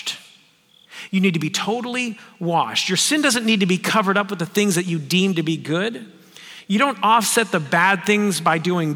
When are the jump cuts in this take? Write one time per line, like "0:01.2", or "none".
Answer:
none